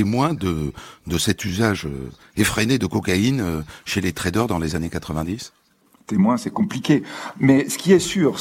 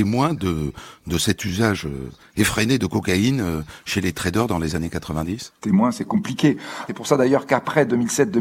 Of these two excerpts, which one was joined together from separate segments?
second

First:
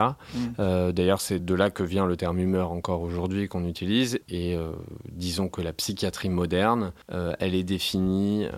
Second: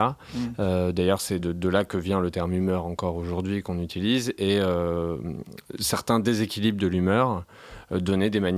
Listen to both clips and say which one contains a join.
first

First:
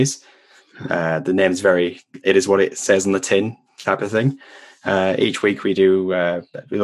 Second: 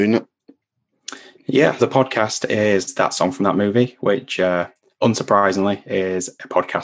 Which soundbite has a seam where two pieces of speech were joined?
second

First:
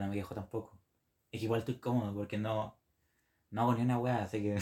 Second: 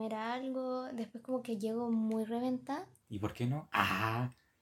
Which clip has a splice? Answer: second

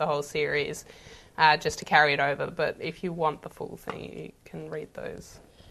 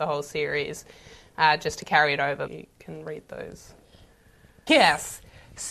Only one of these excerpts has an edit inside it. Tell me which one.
second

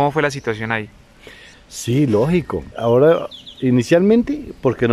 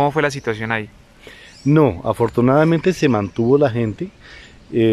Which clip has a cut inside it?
first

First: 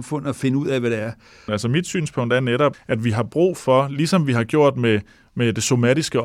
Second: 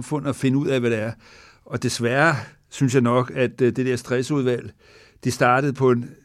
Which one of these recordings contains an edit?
first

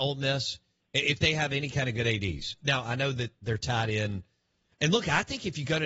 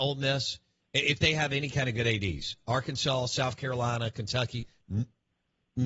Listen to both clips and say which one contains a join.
first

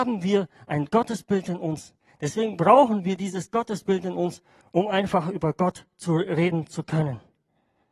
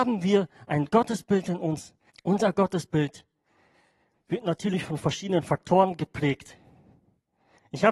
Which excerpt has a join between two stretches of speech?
second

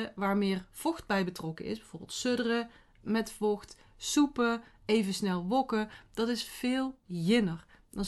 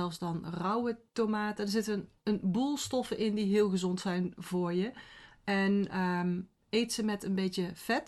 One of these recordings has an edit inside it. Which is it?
first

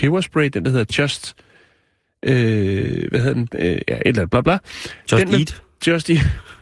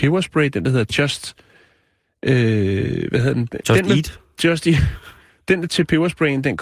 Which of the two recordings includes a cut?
second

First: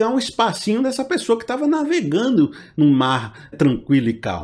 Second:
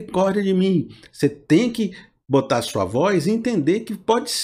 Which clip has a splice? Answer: first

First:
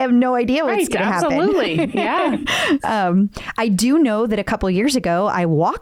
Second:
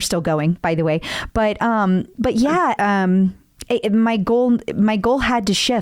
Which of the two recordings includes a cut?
second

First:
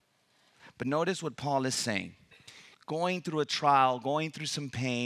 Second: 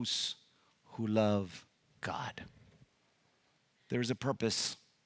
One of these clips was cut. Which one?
first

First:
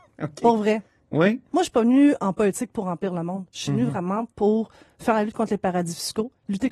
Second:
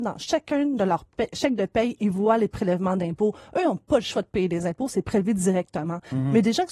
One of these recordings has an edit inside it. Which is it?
first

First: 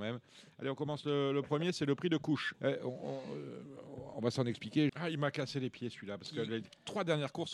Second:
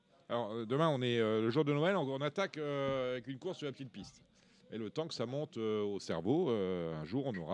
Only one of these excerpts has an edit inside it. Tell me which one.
first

